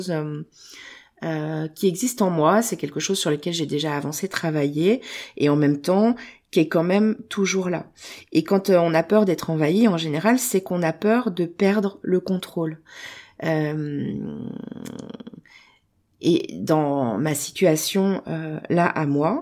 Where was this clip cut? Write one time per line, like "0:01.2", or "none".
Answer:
none